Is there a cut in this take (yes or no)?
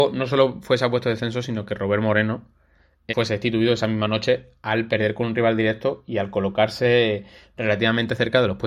yes